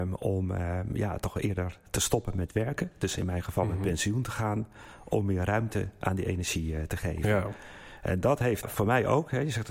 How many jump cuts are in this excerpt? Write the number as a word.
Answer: one